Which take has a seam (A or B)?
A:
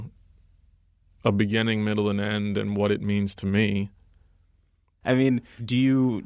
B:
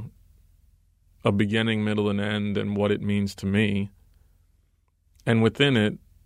A